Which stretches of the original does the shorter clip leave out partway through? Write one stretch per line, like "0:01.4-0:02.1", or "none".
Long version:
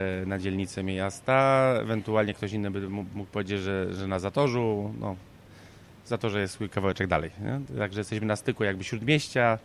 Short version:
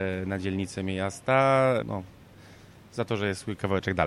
0:01.8-0:04.9

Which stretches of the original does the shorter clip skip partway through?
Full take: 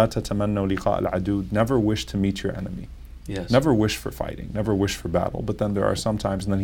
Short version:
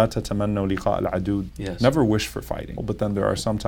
0:01.5-0:03.2
0:04.5-0:05.4

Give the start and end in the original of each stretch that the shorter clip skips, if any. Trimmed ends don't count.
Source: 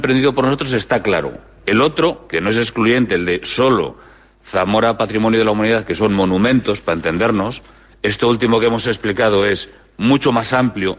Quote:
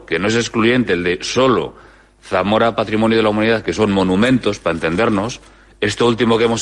none

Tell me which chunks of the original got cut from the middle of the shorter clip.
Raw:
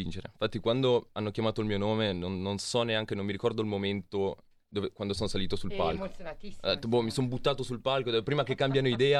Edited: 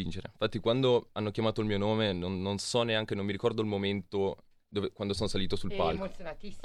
none

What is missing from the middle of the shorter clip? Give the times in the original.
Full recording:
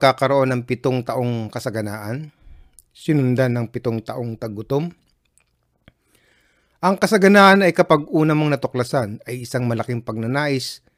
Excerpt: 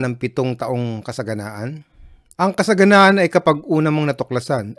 0:02.8-0:06.8

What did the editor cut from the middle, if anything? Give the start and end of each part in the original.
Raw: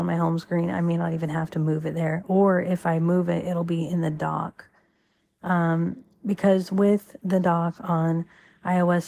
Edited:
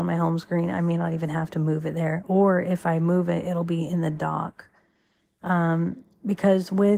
none

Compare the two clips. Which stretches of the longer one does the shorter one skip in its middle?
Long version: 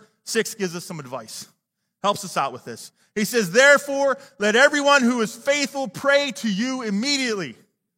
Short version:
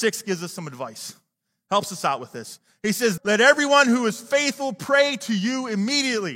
0:03.5-0:04.3

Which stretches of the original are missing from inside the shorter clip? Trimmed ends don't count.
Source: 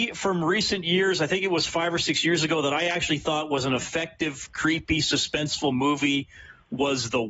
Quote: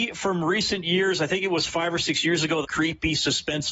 0:02.6-0:04.5

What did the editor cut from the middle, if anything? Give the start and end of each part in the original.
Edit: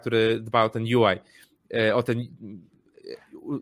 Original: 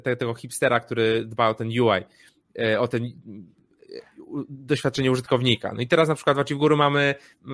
none

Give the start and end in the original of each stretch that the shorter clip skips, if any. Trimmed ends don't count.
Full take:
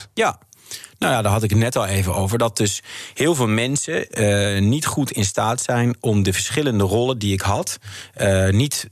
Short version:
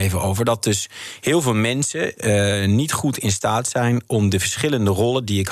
none

